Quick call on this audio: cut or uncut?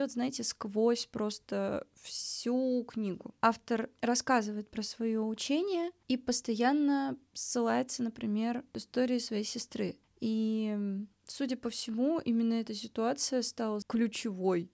uncut